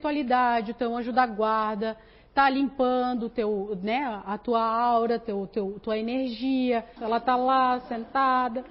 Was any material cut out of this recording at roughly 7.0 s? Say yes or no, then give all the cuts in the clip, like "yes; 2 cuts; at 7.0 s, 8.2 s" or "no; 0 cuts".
yes; 1 cut; at 7.0 s